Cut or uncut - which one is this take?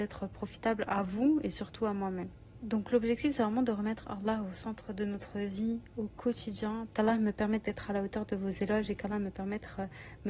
cut